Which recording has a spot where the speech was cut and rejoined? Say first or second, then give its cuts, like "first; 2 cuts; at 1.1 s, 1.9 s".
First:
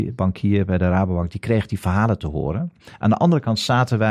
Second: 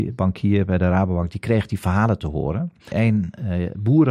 second; 1 cut; at 2.9 s